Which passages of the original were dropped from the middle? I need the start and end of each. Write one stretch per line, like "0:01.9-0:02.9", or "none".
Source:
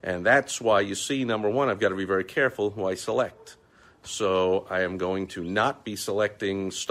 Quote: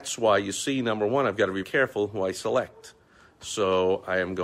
0:02.1-0:02.3